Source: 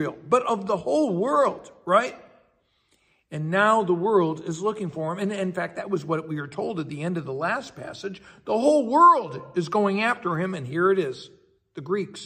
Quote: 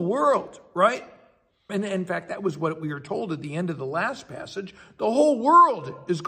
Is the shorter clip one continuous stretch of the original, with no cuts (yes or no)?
no